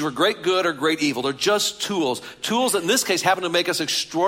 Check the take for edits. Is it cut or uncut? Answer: uncut